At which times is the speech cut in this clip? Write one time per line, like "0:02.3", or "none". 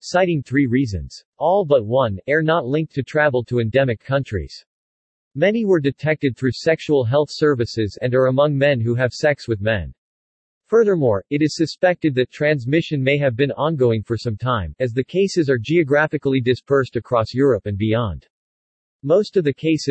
0:01.3